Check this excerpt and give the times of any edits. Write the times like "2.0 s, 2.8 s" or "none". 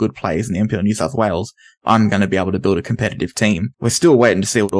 3.7 s